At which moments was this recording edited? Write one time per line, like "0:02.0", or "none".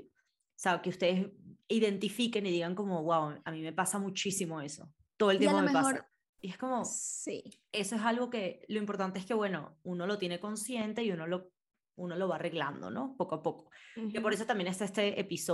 0:06.4